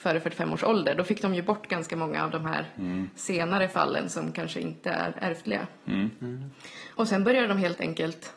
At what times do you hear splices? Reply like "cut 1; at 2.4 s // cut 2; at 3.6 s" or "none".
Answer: none